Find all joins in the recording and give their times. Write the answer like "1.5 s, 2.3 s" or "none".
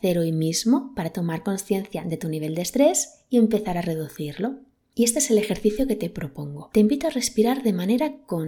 none